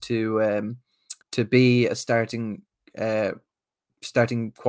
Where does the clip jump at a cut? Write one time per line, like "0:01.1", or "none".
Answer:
0:01.2